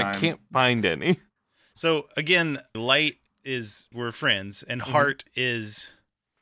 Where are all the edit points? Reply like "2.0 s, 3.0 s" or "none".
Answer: 2.7 s, 3.9 s